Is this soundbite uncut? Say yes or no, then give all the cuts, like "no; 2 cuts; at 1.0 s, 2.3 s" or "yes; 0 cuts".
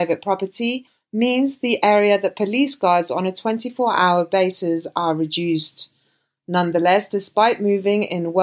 yes; 0 cuts